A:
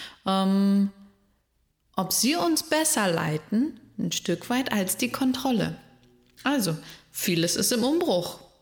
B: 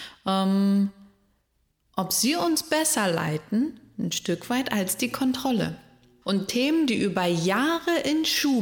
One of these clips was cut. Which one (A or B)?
B